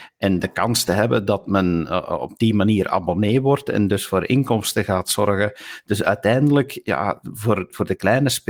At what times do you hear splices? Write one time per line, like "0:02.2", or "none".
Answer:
none